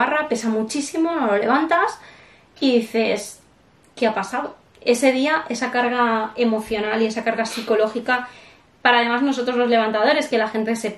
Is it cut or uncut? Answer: uncut